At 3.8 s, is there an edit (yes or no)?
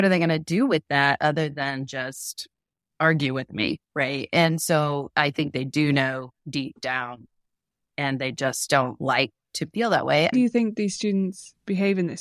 yes